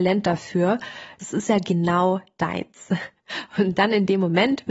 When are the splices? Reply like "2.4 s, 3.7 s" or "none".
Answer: 1.2 s